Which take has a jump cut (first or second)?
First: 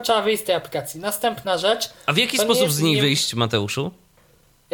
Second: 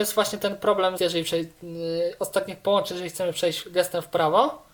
second